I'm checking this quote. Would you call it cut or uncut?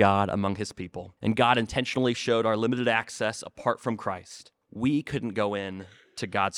cut